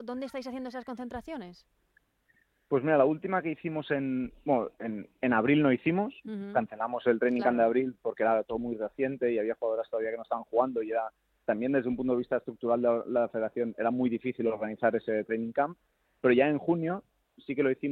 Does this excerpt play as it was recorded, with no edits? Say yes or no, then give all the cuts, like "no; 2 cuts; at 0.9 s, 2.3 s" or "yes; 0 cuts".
yes; 0 cuts